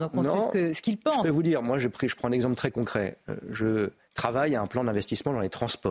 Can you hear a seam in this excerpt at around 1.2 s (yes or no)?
no